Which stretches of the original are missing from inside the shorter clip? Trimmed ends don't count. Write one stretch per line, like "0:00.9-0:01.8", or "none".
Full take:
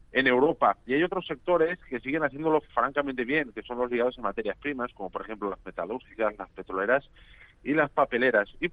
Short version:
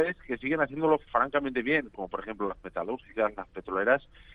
0:03.5-0:04.9